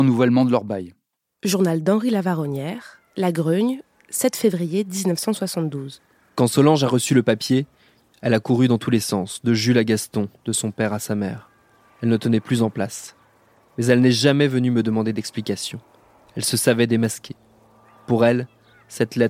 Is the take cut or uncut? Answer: uncut